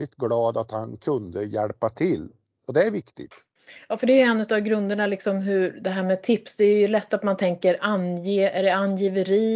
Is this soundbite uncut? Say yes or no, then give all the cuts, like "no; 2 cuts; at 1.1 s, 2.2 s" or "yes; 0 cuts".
yes; 0 cuts